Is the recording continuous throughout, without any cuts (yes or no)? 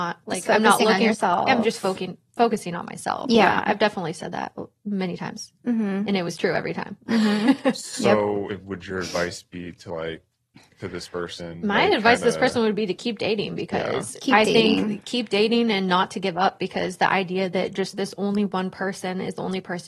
yes